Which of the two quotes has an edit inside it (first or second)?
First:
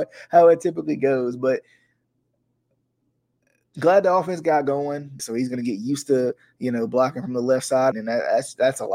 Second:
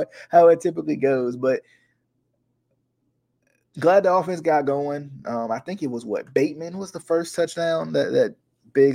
first